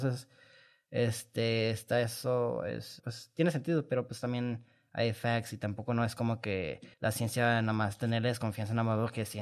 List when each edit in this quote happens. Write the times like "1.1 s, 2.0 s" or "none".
3.0 s, 6.9 s